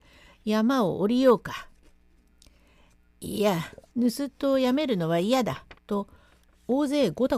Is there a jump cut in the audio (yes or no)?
yes